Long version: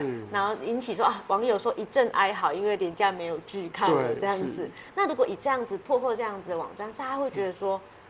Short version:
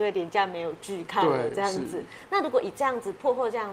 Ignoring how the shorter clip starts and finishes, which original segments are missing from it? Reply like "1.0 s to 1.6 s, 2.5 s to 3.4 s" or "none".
none